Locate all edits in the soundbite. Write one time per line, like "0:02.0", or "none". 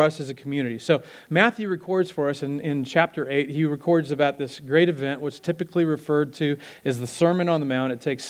none